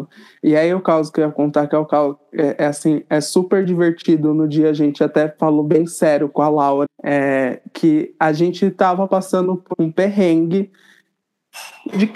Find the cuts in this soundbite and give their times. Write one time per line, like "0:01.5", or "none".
0:06.8
0:09.7